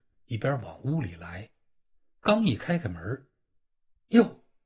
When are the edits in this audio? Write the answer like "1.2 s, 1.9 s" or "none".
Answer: none